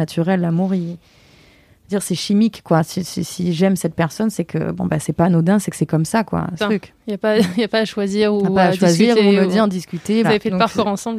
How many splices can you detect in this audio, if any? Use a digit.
2